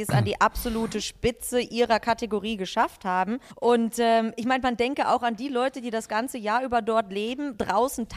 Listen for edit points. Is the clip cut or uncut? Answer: cut